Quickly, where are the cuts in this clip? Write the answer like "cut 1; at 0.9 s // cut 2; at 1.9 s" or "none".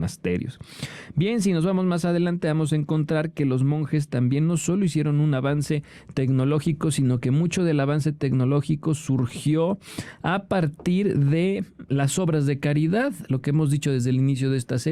none